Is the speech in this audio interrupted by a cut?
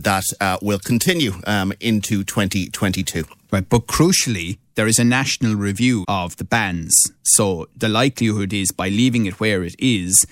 yes; 1 cut; at 6.0 s

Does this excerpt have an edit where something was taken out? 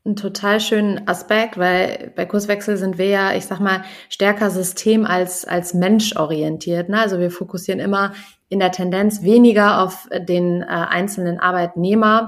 no; 0 cuts

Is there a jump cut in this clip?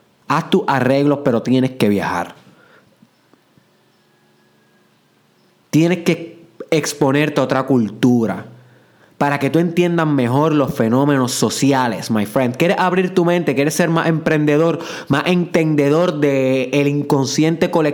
no; 0 cuts

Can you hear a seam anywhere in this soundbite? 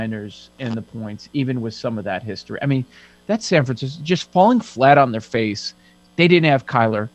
no; 0 cuts

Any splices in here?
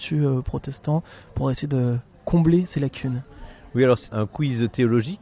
yes; 1 cut; at 4.1 s

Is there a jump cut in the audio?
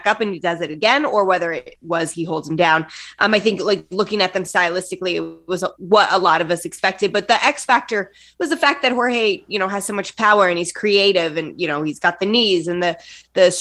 no; 0 cuts

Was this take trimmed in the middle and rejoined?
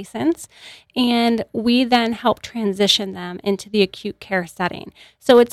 no; 0 cuts

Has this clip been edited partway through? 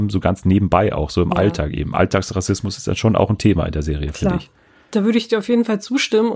no; 0 cuts

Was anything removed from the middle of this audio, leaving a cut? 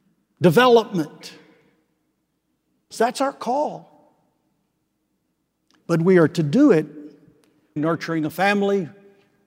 yes; 2 cuts; at 2.9 s, 7.8 s

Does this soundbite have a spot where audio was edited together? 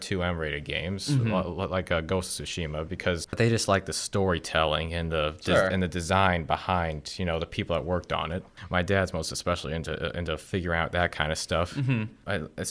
no; 0 cuts

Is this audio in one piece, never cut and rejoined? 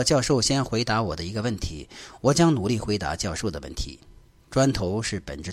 yes; 0 cuts

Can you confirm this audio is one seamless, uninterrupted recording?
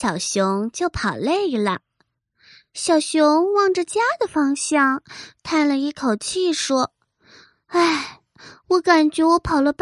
yes; 0 cuts

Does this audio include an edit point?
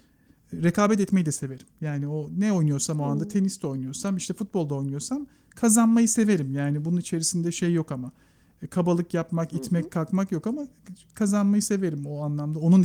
no; 0 cuts

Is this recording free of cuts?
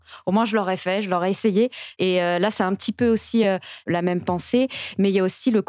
yes; 0 cuts

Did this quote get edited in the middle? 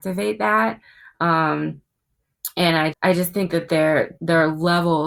yes; 2 cuts; at 2.9 s, 4.2 s

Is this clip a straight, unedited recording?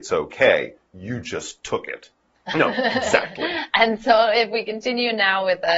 no; 1 cut; at 2.4 s

